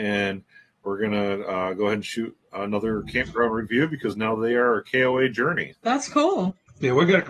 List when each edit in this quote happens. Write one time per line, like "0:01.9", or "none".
0:05.7